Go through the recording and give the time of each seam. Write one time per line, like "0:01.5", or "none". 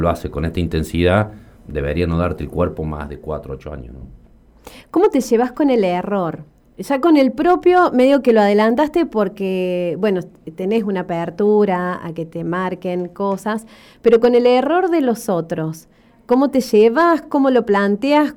none